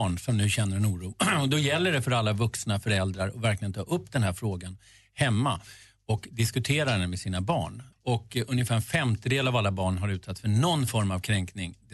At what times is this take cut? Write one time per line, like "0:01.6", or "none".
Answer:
0:07.9